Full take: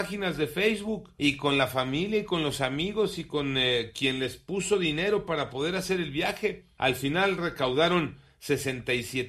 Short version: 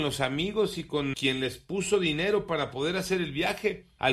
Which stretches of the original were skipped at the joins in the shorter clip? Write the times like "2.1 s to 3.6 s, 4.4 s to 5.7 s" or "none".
3.5 s to 3.9 s